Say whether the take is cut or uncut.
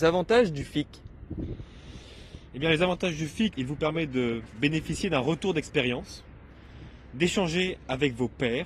cut